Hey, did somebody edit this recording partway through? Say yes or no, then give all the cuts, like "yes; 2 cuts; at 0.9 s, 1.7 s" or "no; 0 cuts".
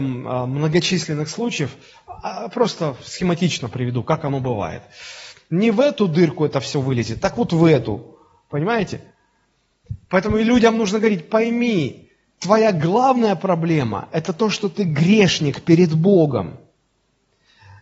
yes; 1 cut; at 5.4 s